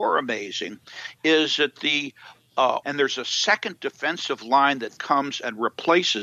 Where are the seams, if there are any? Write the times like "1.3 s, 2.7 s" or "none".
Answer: 2.8 s, 5.0 s